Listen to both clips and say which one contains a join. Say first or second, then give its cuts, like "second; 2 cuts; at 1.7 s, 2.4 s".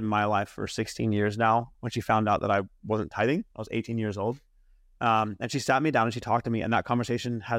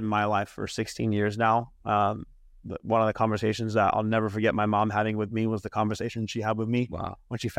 first; 1 cut; at 1.7 s